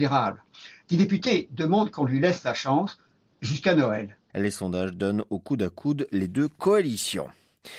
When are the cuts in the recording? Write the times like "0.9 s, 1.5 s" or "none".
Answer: 4.3 s